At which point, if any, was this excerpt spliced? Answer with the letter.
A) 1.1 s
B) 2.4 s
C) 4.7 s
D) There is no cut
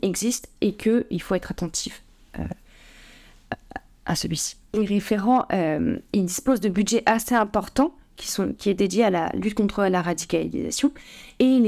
C